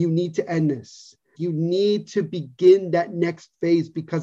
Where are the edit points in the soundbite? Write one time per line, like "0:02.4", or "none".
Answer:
0:01.3